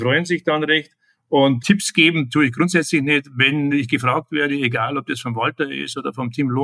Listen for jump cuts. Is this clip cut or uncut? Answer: cut